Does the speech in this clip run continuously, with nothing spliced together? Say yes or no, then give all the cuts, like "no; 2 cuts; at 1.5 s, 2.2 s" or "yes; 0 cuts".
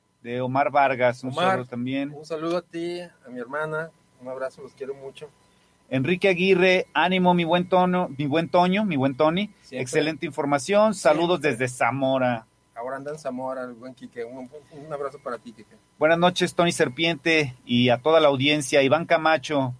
yes; 0 cuts